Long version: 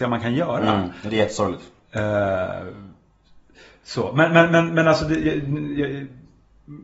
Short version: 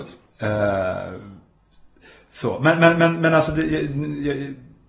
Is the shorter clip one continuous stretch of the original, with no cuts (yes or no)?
yes